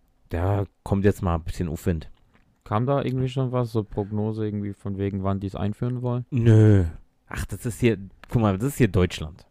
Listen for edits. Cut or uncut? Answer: uncut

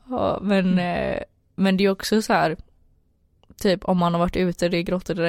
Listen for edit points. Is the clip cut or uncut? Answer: uncut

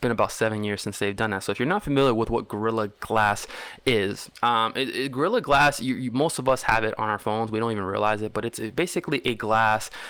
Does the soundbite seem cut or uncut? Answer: uncut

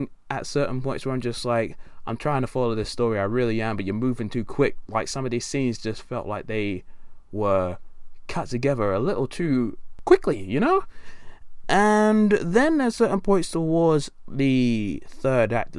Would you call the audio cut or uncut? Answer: uncut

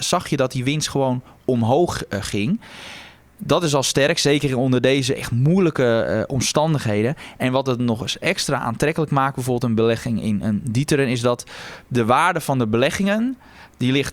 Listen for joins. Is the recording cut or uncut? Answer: uncut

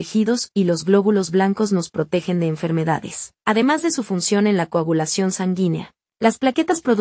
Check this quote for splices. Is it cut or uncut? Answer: cut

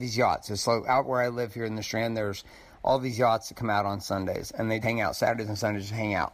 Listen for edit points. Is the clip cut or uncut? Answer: cut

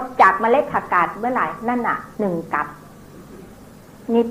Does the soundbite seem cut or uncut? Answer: cut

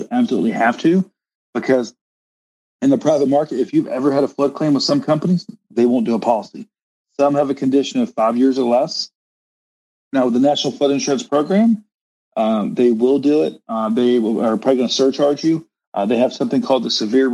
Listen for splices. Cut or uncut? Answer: uncut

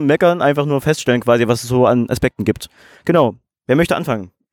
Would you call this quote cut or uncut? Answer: uncut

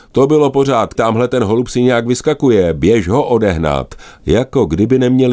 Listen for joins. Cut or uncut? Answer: cut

